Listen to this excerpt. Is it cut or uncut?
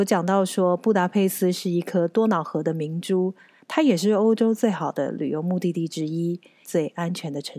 cut